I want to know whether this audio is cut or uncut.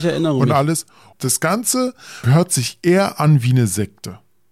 cut